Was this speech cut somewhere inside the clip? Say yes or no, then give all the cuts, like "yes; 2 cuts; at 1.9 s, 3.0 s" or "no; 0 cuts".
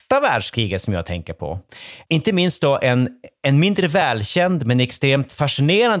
no; 0 cuts